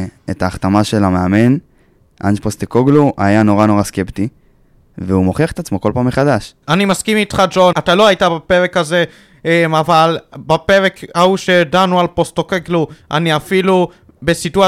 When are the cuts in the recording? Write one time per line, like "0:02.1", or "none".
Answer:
0:06.6
0:07.7